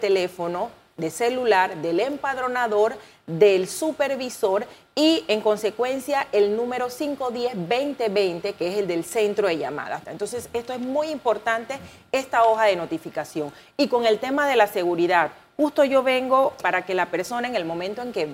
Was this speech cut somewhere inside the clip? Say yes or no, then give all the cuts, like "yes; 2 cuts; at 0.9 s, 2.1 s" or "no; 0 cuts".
yes; 2 cuts; at 10.0 s, 16.6 s